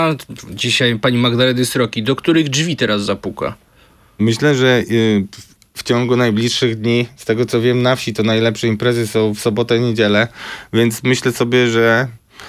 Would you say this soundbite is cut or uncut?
uncut